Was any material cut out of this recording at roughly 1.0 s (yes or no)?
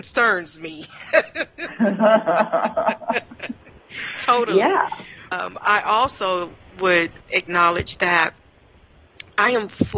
no